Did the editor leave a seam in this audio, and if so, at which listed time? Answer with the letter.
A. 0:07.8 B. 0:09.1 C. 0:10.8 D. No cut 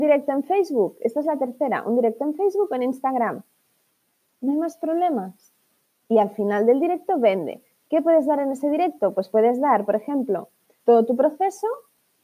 C